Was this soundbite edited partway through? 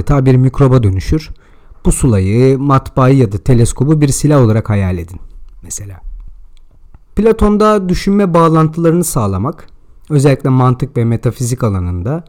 yes; 1 cut; at 7.1 s

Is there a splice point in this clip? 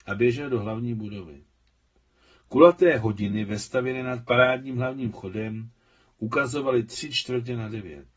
no; 0 cuts

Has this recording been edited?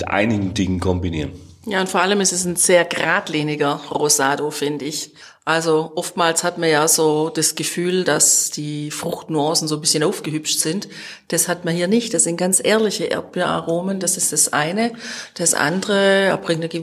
no; 0 cuts

